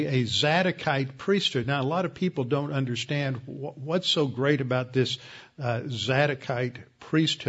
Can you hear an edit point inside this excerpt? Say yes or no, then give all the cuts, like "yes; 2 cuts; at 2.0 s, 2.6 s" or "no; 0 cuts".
no; 0 cuts